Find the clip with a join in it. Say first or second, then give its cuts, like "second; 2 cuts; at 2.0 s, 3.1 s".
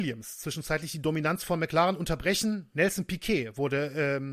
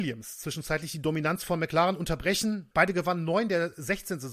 second; 1 cut; at 2.7 s